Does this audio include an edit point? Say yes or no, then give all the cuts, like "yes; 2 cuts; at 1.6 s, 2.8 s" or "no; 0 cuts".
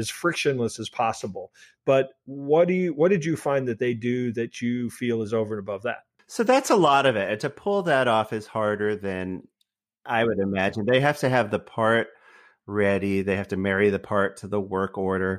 no; 0 cuts